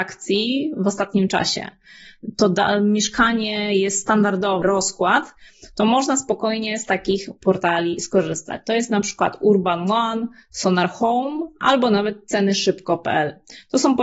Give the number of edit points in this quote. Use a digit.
1